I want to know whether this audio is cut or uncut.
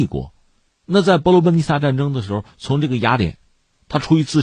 uncut